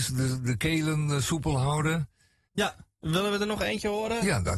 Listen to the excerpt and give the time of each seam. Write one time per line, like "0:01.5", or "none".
0:02.5